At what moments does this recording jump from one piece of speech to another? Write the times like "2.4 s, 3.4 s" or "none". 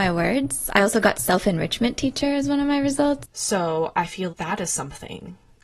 3.2 s, 4.3 s